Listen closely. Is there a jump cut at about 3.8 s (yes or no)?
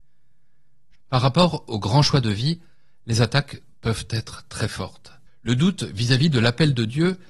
no